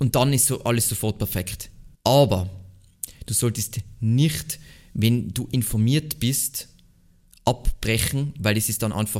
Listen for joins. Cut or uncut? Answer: cut